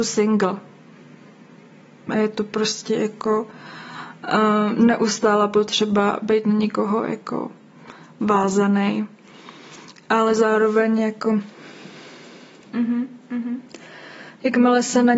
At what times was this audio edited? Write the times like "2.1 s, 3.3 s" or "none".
none